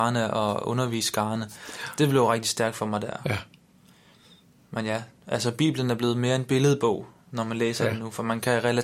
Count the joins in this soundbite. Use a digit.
0